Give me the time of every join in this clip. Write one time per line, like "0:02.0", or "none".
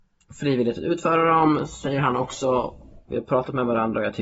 0:03.1